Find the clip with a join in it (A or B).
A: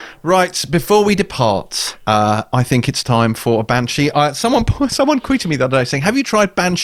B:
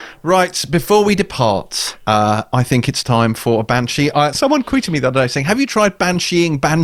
B